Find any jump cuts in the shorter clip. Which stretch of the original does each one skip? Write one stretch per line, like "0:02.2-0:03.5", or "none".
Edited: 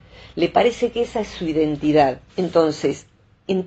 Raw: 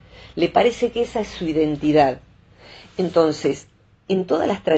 0:02.3-0:02.9